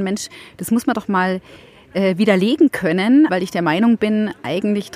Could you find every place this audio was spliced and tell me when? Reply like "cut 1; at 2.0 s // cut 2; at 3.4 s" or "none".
cut 1; at 3.3 s